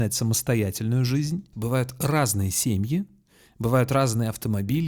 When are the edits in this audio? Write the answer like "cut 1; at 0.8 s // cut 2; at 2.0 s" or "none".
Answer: cut 1; at 1.5 s